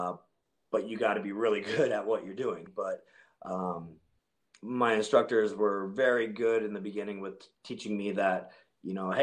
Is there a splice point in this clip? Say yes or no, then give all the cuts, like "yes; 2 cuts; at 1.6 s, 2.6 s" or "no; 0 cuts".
yes; 1 cut; at 2.7 s